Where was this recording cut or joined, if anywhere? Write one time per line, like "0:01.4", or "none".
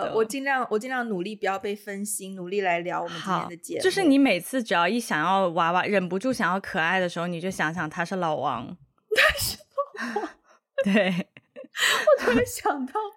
none